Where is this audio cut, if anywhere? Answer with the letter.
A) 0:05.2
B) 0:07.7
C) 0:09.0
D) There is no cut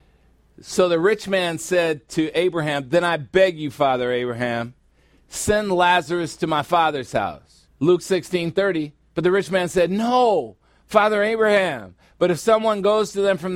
B